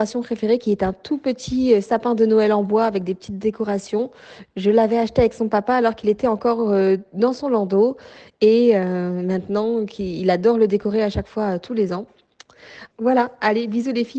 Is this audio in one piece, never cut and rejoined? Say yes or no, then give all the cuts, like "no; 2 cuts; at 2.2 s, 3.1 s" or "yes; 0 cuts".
no; 1 cut; at 12.9 s